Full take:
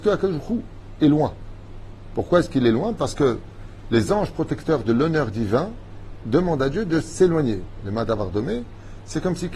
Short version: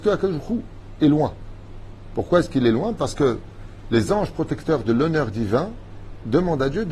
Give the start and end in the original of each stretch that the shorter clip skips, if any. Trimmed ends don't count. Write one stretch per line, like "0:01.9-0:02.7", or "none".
none